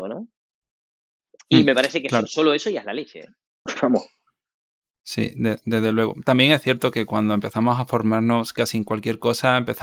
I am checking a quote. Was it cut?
yes; 1 cut; at 3.7 s

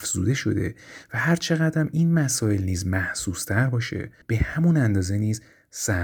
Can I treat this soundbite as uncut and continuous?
no; 1 cut; at 4.2 s

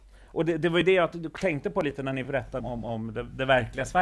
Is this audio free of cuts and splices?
no; 1 cut; at 2.6 s

